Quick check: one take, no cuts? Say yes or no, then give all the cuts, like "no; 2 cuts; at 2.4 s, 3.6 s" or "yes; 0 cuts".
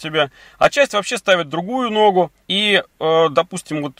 no; 1 cut; at 2.4 s